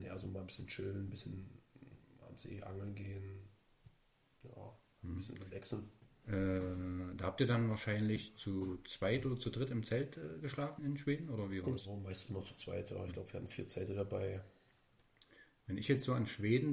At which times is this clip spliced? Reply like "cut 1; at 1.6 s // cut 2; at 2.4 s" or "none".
cut 1; at 10.8 s